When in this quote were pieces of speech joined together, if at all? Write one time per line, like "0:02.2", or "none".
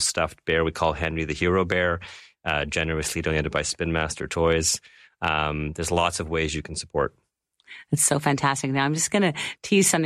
none